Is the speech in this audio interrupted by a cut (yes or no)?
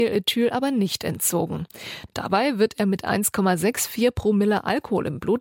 yes